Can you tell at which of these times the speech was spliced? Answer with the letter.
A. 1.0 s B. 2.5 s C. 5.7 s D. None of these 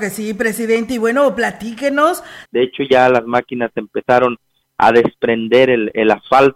B